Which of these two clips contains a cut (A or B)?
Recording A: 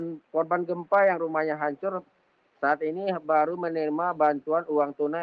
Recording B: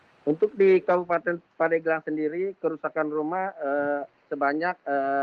B